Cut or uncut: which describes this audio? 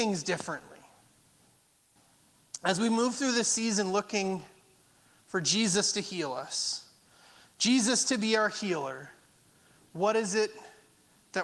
uncut